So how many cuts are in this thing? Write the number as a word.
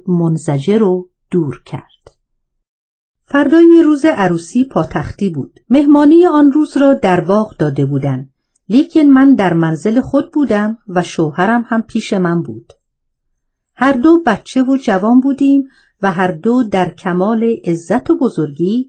one